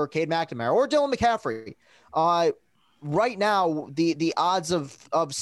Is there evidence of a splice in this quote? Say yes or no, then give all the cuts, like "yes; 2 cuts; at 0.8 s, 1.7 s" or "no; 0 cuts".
no; 0 cuts